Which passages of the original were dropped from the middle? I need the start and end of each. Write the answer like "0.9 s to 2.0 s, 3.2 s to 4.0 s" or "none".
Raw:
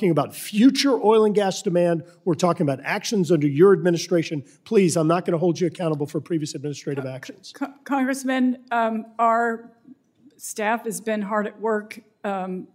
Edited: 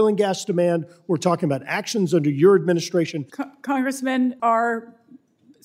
4.5 s to 7.5 s, 8.6 s to 9.2 s

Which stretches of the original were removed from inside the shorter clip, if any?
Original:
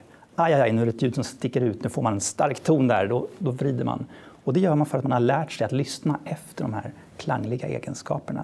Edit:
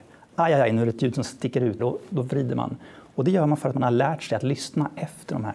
1.8 s to 3.1 s

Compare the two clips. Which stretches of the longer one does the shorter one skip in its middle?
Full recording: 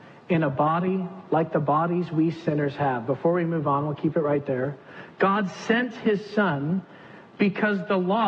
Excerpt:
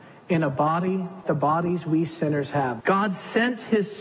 1.2 s to 1.5 s, 3.1 s to 5.1 s

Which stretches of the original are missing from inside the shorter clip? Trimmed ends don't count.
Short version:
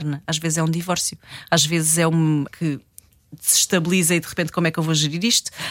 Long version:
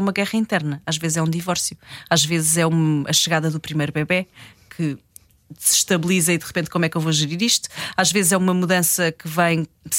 3.1 s to 4.6 s

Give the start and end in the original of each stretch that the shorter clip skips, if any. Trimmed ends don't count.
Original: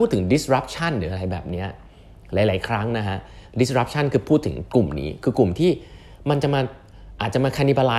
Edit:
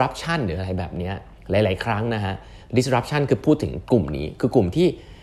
1.9 s to 2.2 s

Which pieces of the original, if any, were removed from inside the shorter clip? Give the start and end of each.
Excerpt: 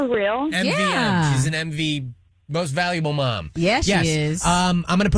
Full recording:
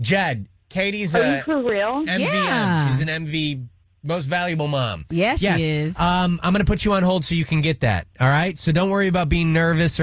none

